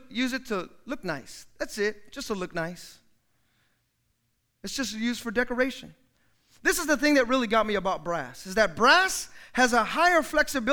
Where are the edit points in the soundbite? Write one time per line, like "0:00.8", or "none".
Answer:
none